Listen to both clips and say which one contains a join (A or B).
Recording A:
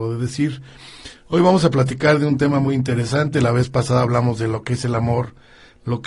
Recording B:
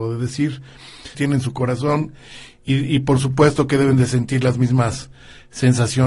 B